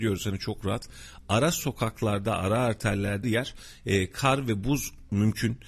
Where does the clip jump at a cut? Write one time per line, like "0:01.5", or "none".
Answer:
0:03.2